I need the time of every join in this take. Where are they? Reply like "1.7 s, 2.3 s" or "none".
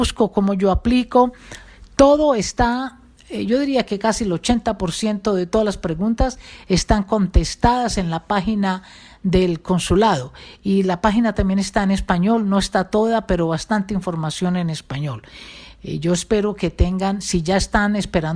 none